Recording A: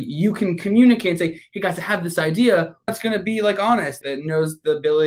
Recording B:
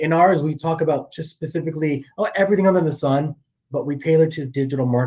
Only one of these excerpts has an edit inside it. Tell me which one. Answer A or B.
A